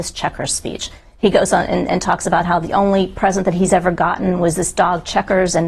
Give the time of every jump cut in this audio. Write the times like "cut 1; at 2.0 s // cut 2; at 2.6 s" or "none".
cut 1; at 1.0 s